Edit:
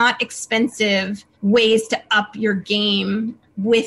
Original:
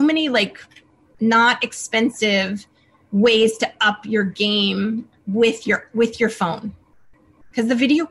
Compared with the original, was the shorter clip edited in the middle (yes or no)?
yes